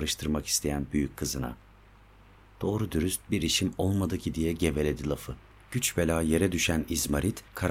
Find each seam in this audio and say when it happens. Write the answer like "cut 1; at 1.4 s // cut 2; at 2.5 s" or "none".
cut 1; at 5.6 s

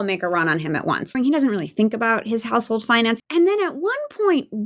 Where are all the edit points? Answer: cut 1; at 1.1 s // cut 2; at 3.2 s

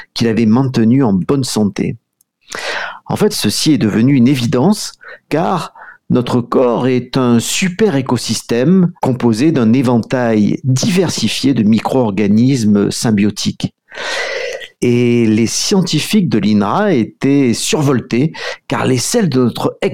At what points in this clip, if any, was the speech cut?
cut 1; at 3.3 s // cut 2; at 9.0 s // cut 3; at 14.8 s

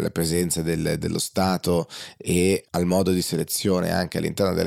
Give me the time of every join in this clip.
none

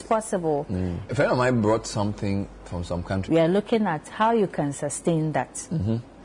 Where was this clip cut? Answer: cut 1; at 1.1 s // cut 2; at 3.3 s

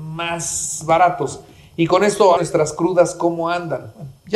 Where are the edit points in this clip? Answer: cut 1; at 2.4 s

